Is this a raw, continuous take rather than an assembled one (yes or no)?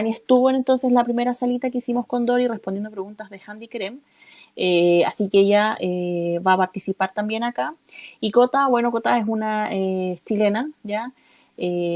yes